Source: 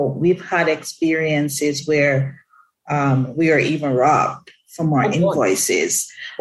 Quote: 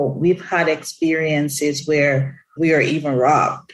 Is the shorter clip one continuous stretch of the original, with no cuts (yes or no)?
no